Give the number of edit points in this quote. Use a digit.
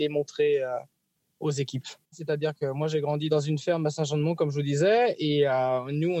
1